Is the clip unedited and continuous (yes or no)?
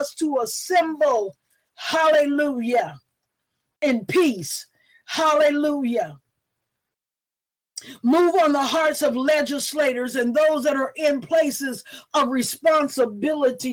yes